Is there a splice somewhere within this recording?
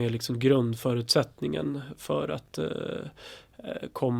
no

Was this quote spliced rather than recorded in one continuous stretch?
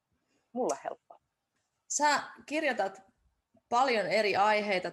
no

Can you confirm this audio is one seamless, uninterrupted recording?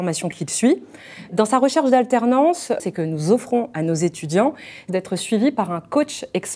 no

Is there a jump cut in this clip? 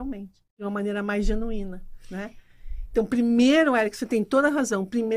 no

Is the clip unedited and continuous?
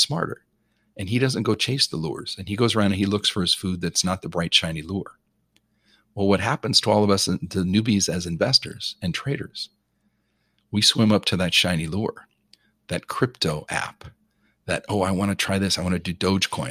yes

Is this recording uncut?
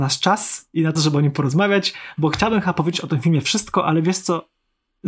no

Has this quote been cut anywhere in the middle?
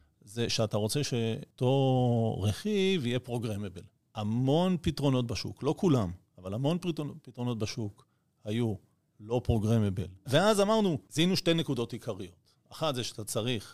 yes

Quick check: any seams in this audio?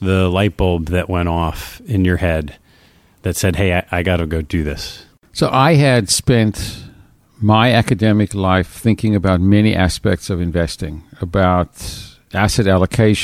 no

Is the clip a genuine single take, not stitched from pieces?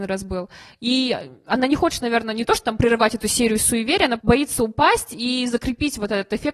no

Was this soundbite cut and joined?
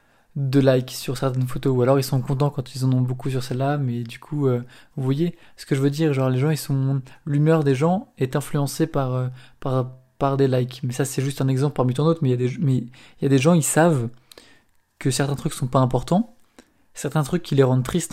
no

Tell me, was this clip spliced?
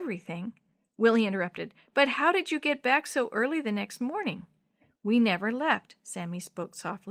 no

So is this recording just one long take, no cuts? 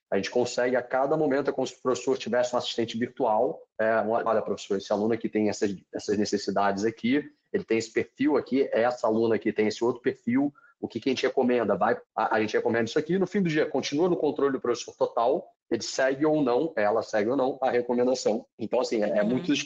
no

